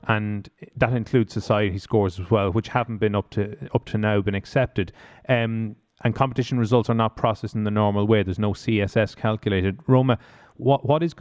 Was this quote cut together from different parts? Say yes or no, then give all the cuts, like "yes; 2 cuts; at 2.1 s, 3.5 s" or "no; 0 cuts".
no; 0 cuts